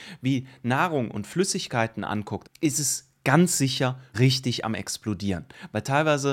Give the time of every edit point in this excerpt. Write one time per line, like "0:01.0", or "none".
0:02.4
0:04.1

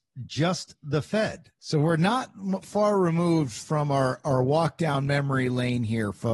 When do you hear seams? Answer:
0:01.6

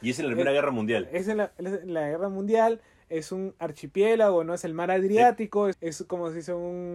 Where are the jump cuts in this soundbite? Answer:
0:05.7

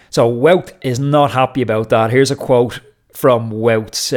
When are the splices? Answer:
none

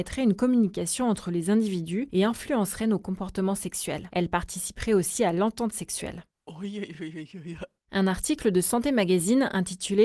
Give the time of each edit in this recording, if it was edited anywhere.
none

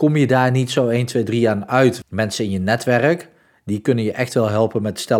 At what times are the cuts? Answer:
0:02.0

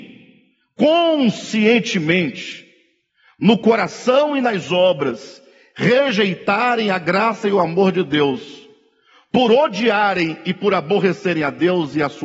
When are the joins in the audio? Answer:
none

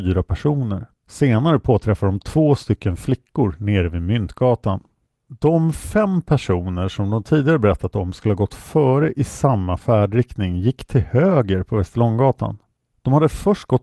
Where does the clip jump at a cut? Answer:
0:00.9

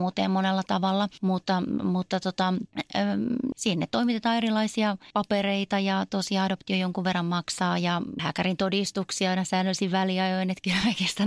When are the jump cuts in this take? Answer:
0:03.5
0:08.2

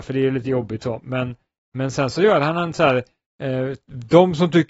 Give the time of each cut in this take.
none

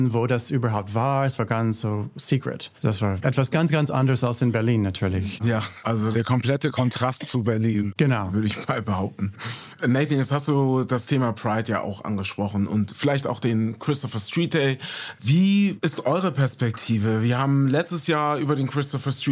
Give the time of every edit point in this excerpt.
none

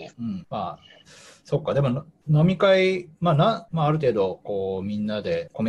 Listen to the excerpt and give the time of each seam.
0:03.7

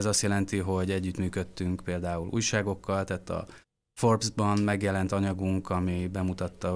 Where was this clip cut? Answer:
none

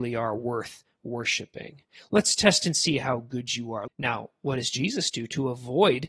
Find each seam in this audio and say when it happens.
0:03.9

